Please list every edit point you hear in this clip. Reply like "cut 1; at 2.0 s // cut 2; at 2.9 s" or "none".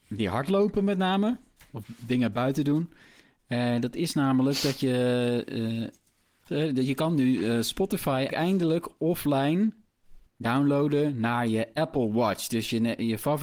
cut 1; at 6.5 s // cut 2; at 8.3 s // cut 3; at 10.3 s